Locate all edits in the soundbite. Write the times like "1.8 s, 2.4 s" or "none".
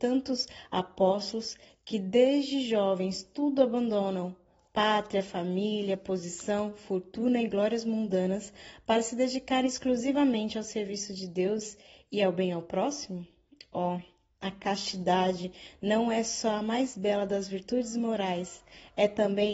none

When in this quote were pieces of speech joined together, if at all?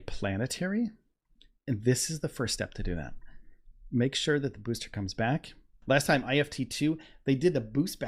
5.8 s

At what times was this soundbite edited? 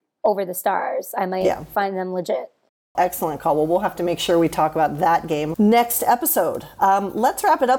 2.9 s, 5.5 s

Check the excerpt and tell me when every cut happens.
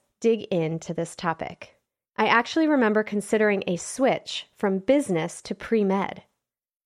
2.0 s

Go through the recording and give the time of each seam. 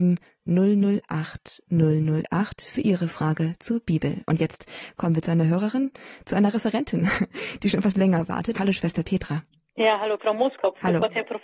8.5 s, 10.2 s

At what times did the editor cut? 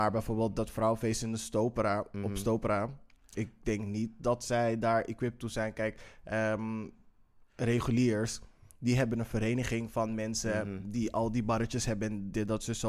none

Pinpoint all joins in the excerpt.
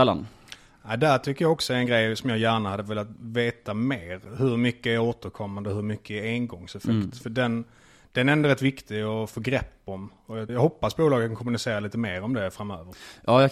10.5 s

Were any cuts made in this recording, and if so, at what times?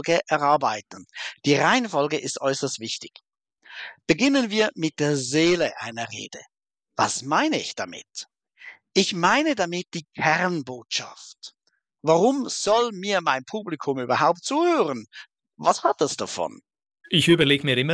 none

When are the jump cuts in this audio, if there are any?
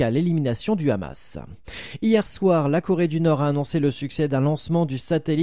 none

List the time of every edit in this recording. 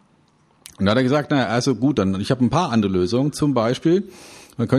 none

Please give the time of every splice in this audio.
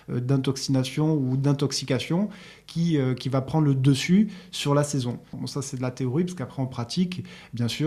5.3 s

